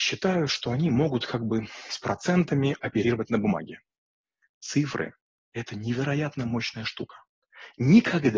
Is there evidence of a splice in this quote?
no; 0 cuts

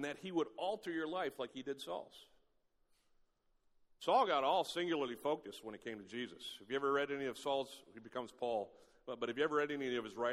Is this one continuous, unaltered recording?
yes; 0 cuts

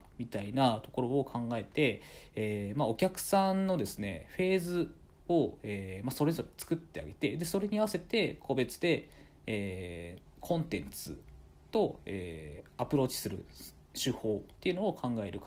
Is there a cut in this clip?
no; 0 cuts

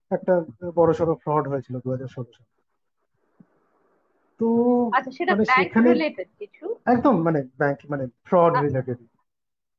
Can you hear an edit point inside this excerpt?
yes; 2 cuts; at 6.8 s, 8.2 s

